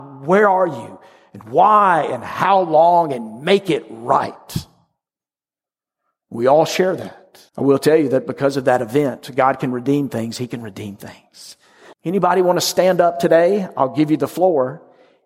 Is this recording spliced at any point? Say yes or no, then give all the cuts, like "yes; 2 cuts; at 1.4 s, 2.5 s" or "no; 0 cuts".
yes; 2 cuts; at 7.5 s, 11.9 s